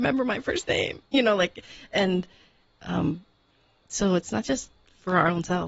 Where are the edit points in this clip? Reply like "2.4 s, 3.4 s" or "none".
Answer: none

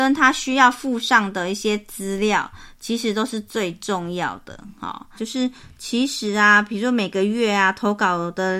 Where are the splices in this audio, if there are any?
5.2 s

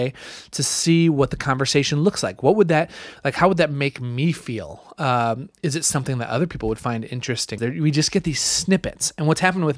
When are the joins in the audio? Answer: 7.6 s

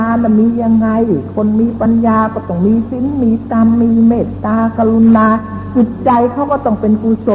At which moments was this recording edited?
none

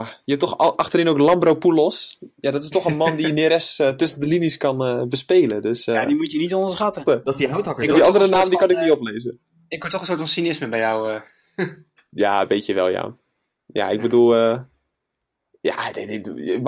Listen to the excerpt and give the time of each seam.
7.1 s

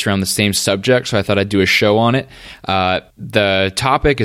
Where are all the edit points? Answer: 3.1 s

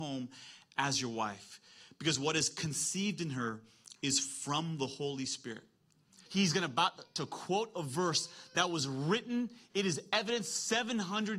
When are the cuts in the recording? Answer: 6.3 s

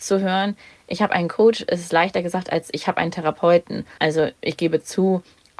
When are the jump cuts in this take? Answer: 4.0 s

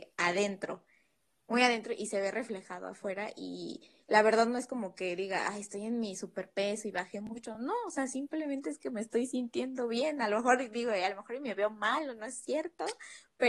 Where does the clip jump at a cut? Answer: none

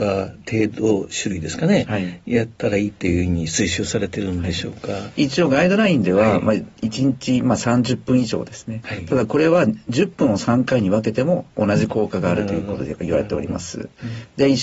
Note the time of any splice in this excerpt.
none

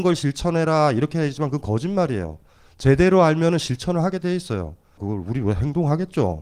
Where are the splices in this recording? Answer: 5.0 s

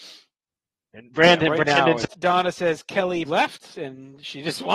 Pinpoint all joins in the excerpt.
2.1 s, 3.2 s

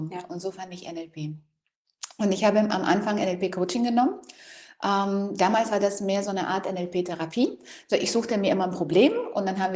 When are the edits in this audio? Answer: none

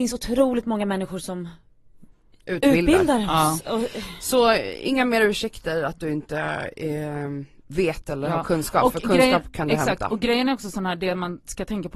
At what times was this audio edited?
none

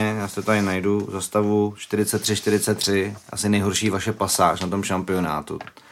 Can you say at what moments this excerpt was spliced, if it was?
none

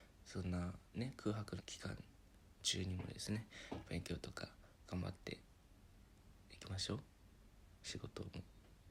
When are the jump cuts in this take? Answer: 1.6 s

